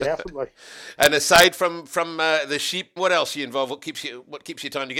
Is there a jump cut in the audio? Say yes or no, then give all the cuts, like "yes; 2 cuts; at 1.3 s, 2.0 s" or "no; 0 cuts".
yes; 2 cuts; at 1.0 s, 3.0 s